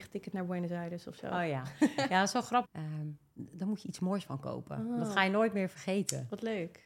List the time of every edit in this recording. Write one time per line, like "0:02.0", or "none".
0:02.6

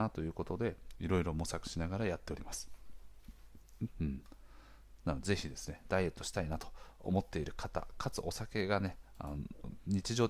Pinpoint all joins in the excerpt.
0:03.9

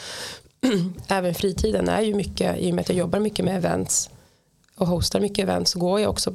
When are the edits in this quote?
none

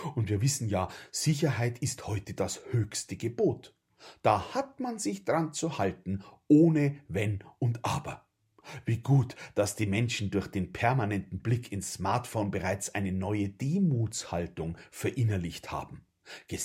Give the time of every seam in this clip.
none

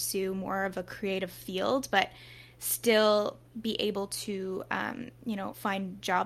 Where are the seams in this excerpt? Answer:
none

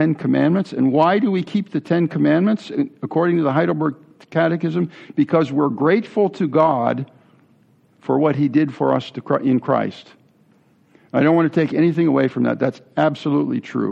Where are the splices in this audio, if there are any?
none

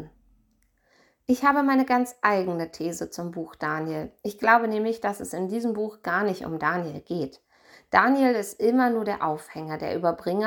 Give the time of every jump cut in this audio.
none

